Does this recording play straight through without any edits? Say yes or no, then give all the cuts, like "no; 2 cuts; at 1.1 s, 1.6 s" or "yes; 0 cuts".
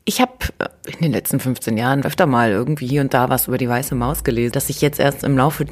no; 2 cuts; at 2.0 s, 4.5 s